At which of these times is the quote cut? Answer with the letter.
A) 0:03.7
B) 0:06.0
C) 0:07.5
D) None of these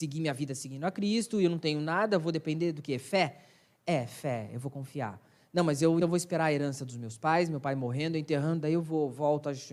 B